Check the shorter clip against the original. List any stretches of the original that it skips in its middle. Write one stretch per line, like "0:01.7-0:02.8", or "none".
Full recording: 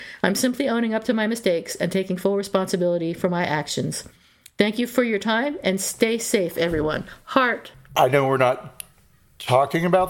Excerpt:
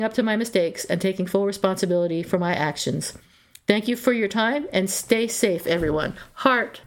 none